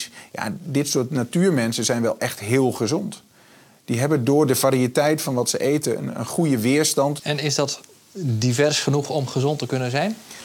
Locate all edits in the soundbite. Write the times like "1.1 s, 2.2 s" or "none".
7.2 s